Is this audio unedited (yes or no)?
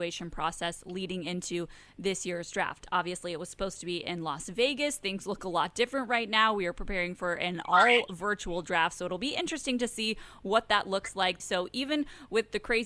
no